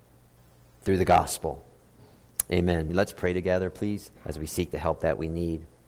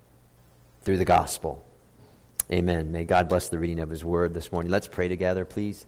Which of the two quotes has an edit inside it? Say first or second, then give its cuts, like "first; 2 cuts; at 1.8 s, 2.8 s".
first; 2 cuts; at 2.9 s, 4.2 s